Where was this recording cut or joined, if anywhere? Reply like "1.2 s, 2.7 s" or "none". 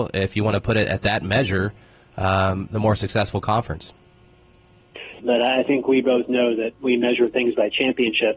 5.2 s